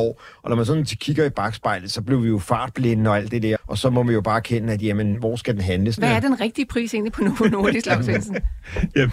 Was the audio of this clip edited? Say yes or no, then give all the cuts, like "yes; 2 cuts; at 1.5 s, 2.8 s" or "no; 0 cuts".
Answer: yes; 2 cuts; at 3.6 s, 6.0 s